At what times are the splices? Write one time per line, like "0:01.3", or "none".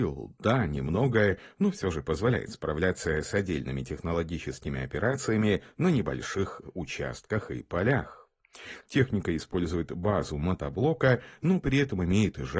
0:08.8